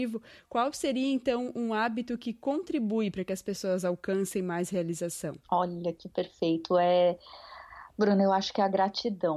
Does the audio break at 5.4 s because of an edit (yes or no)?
yes